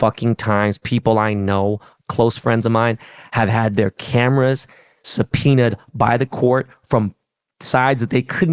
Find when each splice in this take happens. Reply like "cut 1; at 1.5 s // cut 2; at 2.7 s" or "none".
none